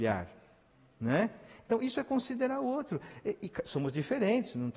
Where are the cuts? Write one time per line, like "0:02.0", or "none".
none